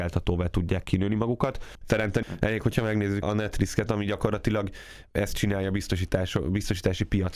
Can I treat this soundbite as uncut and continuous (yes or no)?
no